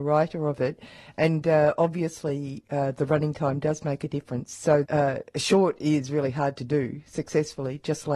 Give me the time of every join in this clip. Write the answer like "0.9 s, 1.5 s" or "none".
4.8 s